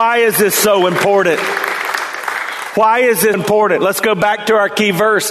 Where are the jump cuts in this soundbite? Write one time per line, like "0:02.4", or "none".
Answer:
0:03.3